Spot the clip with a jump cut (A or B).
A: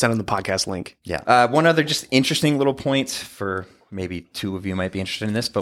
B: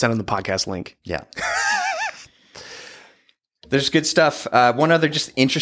A